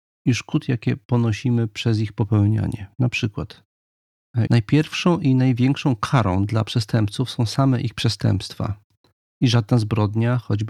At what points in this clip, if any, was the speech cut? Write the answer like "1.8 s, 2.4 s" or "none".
4.5 s